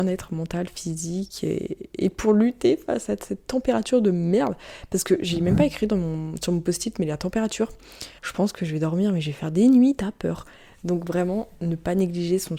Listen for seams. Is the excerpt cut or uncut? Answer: cut